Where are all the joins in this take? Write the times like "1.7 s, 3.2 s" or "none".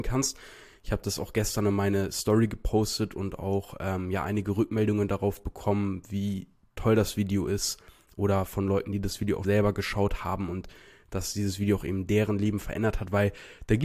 9.4 s

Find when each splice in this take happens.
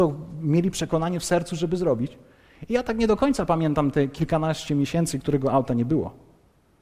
none

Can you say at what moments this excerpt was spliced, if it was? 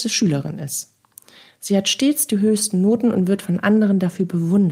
none

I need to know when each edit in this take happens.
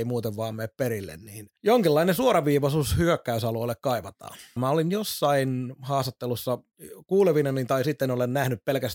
1.6 s, 4.6 s

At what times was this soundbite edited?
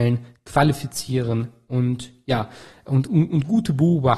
none

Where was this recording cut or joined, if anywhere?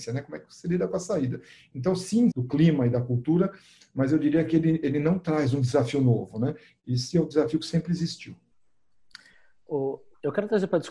2.3 s

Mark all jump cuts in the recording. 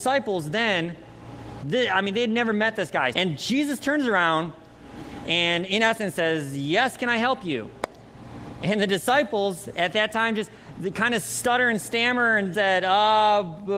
3.1 s, 12.5 s

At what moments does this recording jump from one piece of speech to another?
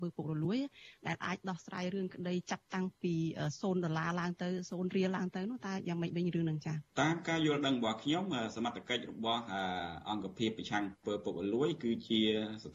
6.9 s

